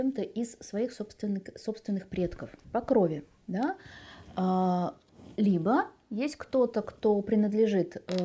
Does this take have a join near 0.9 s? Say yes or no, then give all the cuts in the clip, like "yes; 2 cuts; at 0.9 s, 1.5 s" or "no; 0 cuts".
no; 1 cut; at 2.6 s